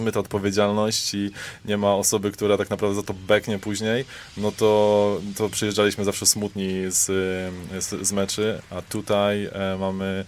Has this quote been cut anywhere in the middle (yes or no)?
no